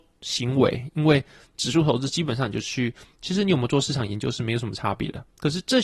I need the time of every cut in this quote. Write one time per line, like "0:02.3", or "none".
0:03.1